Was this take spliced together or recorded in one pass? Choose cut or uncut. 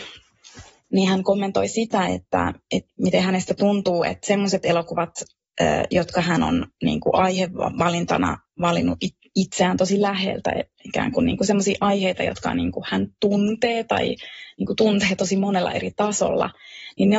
uncut